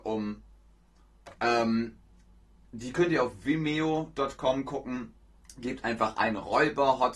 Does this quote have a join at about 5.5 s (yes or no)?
no